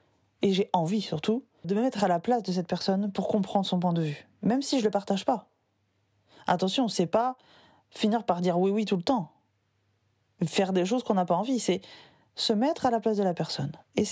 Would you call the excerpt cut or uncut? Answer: cut